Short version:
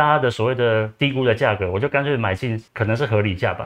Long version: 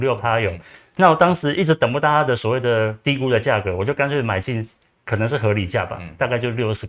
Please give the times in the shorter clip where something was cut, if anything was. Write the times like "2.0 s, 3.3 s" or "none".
2.7 s